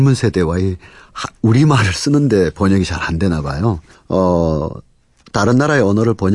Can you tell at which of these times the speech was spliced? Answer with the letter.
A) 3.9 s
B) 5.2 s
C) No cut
A